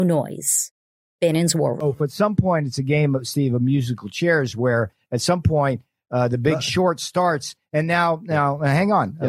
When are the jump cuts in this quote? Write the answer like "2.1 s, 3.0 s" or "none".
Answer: 2.0 s